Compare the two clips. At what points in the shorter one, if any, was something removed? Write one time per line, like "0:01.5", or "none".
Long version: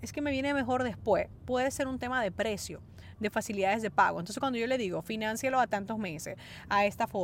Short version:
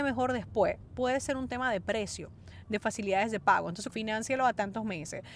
0:03.9